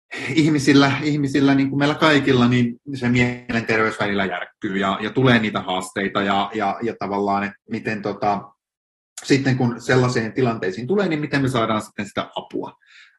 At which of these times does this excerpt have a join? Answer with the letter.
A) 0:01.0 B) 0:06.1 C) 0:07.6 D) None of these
C